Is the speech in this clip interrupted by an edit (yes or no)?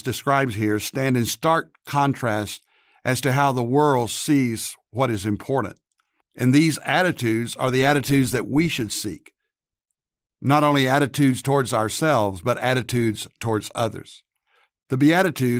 yes